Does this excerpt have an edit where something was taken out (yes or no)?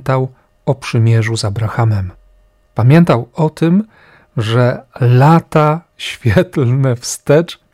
no